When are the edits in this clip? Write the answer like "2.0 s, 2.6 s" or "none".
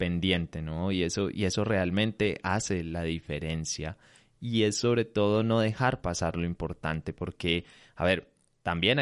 none